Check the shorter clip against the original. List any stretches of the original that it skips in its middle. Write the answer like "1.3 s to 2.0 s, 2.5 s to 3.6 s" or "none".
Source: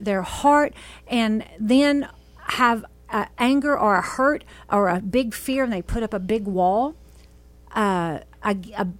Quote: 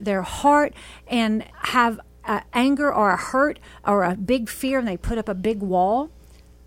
1.5 s to 2.3 s